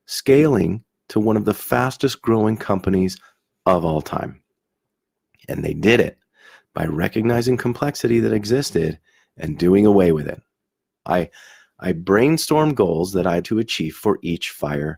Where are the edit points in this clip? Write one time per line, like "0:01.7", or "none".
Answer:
0:11.1
0:13.4